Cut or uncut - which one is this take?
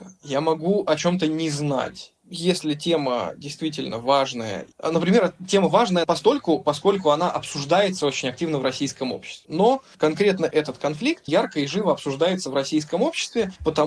cut